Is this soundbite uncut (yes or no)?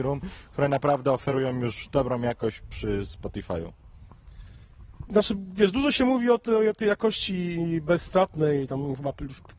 no